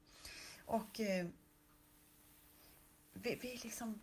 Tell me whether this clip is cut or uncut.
uncut